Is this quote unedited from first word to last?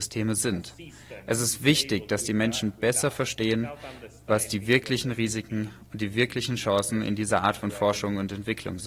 yes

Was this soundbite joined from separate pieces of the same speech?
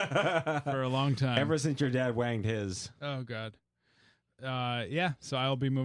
no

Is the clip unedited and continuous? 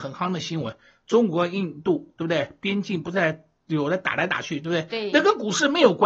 yes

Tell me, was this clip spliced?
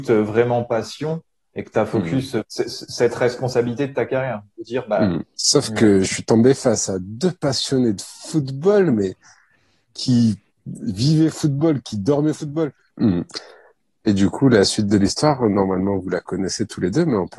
yes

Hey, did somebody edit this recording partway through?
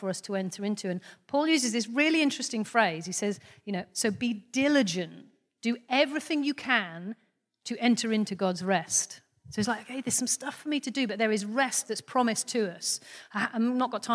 no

